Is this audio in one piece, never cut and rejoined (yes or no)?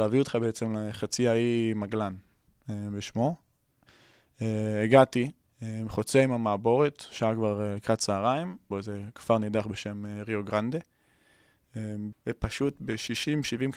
no